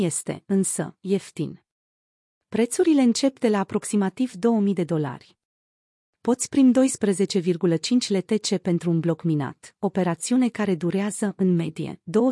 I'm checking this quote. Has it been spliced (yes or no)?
no